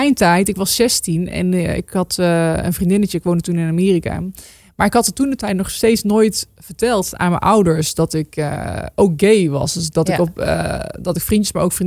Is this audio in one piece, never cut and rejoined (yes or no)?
yes